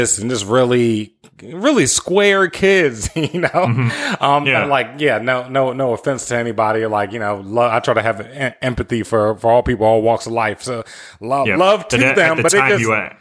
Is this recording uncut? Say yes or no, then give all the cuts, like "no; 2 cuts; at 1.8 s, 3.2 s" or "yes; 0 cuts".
yes; 0 cuts